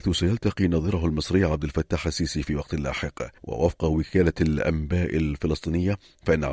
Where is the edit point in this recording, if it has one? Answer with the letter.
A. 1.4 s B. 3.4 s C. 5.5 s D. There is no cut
B